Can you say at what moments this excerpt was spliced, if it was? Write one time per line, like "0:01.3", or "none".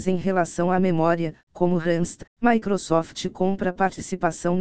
0:02.3